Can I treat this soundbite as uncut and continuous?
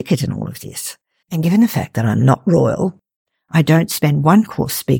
no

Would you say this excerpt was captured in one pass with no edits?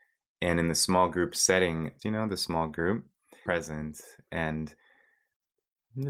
no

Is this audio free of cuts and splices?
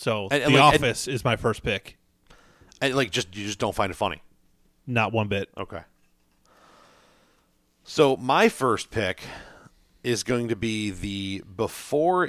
yes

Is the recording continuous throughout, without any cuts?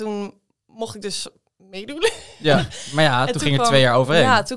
yes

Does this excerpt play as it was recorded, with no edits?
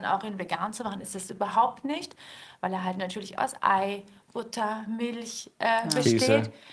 yes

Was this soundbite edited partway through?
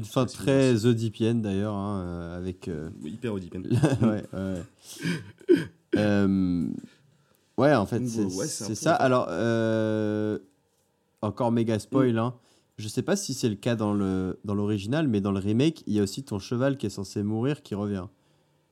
no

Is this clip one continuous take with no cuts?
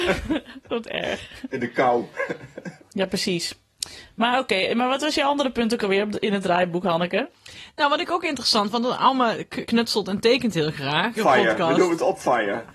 no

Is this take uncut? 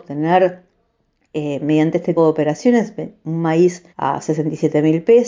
no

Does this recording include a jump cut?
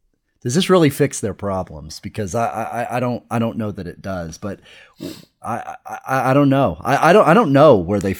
no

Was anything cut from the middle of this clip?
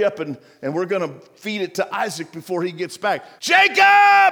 yes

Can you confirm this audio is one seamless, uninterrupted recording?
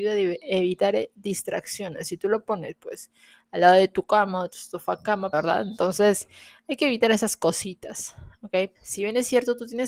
no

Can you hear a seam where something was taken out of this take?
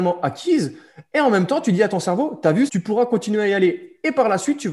yes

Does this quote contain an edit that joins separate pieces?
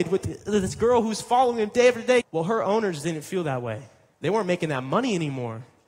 yes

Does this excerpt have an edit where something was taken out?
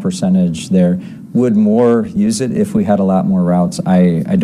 no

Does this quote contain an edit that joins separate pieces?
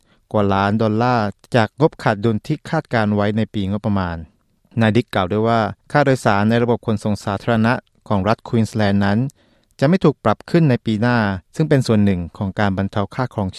yes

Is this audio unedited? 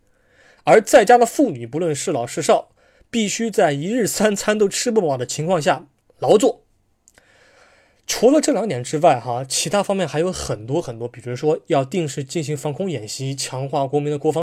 yes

